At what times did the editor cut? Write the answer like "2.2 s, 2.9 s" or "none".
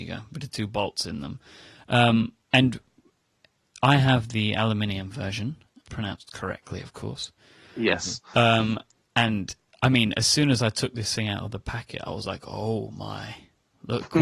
2.4 s, 5.8 s